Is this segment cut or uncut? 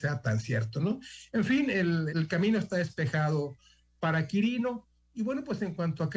cut